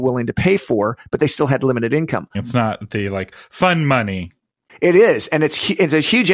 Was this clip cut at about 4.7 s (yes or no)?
no